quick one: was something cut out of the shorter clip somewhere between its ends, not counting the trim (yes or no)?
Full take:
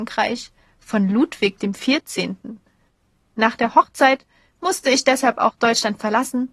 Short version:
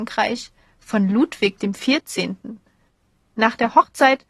no